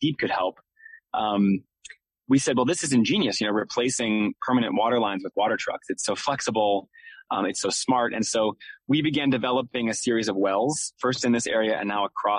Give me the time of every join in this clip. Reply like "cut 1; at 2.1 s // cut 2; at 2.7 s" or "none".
none